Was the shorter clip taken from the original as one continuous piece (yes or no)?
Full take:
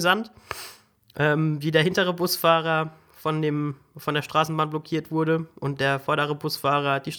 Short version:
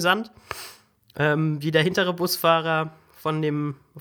yes